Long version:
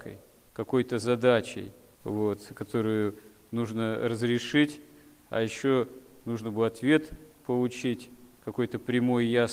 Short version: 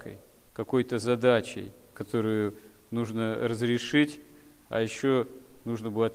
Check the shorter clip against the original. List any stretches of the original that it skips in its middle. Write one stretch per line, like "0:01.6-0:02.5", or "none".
0:01.9-0:02.5